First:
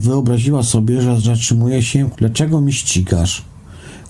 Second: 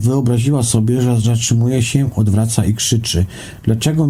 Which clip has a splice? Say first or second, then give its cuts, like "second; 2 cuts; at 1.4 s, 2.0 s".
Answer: first; 1 cut; at 2.1 s